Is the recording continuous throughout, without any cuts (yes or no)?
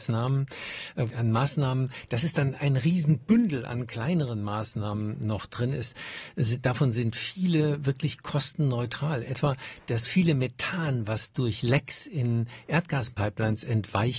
no